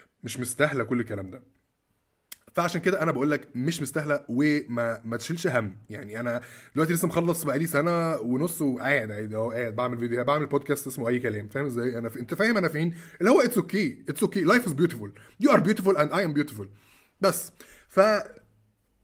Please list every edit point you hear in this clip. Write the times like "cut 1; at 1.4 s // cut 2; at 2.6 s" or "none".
none